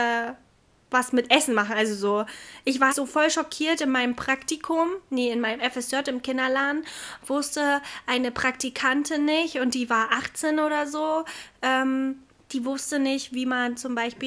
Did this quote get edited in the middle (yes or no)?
yes